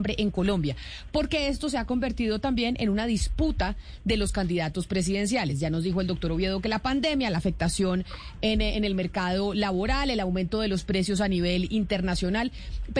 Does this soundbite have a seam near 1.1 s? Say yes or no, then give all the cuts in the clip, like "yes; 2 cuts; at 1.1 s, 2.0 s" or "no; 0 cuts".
no; 0 cuts